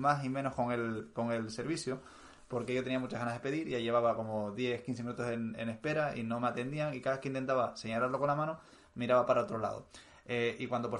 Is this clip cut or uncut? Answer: uncut